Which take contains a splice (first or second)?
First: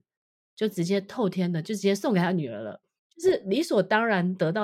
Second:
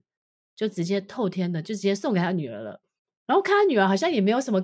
first